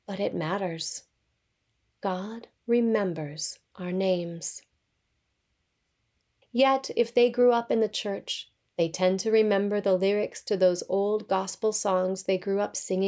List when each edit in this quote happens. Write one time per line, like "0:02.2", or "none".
0:06.4